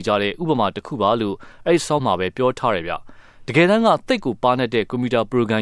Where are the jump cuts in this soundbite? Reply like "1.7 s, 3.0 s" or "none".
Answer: 2.0 s